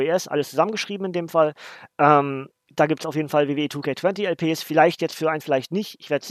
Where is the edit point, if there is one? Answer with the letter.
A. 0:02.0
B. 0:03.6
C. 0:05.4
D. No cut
C